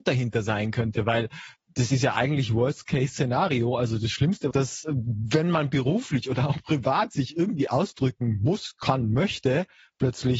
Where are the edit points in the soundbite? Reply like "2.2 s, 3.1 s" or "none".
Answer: 4.5 s